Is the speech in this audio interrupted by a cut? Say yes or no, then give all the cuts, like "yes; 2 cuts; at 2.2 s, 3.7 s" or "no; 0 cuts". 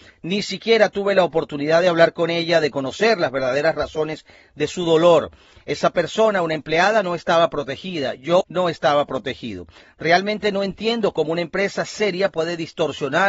yes; 1 cut; at 8.4 s